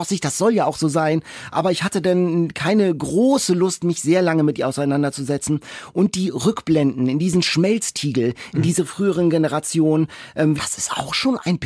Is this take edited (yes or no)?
yes